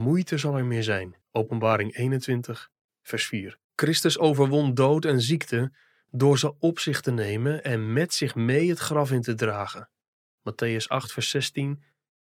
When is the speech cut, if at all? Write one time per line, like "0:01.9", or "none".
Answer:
0:01.2
0:03.6
0:10.4